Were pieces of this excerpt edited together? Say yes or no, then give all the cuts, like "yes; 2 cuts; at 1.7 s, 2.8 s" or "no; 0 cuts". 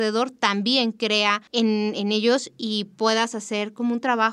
yes; 1 cut; at 1.5 s